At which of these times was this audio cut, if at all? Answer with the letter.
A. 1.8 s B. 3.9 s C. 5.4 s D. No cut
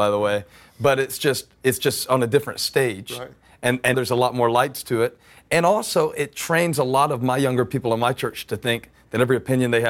B